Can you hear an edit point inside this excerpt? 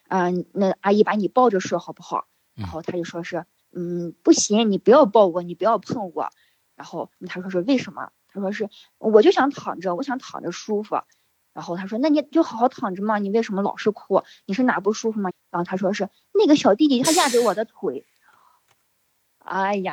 yes; 2 cuts; at 15.3 s, 17.0 s

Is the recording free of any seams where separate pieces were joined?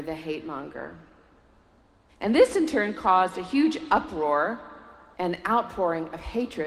no; 2 cuts; at 2.1 s, 5.1 s

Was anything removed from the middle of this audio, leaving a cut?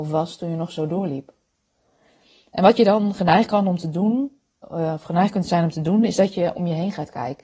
no; 0 cuts

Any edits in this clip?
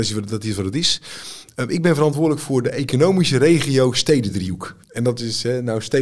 yes; 1 cut; at 4.8 s

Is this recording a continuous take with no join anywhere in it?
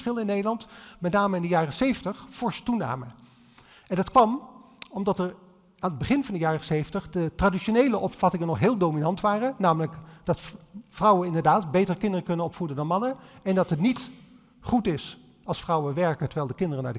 yes; 0 cuts

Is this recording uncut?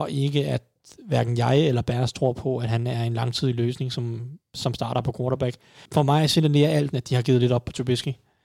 no; 2 cuts; at 5.9 s, 6.9 s

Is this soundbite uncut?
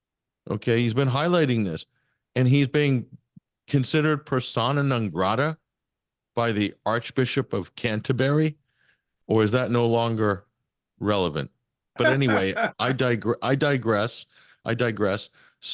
no; 2 cuts; at 9.2 s, 12.0 s

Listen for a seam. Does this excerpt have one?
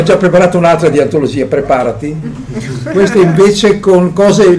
no; 0 cuts

